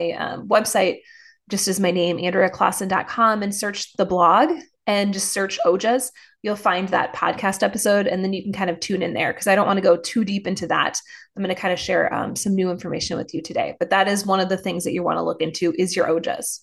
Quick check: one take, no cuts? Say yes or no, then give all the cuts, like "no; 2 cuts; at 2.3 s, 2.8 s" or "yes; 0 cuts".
yes; 0 cuts